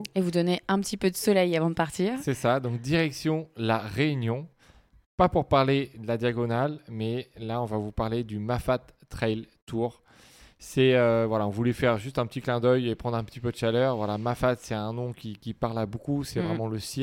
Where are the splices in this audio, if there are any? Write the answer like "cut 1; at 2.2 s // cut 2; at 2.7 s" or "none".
none